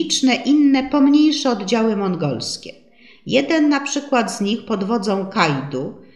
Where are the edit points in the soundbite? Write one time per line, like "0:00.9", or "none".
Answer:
none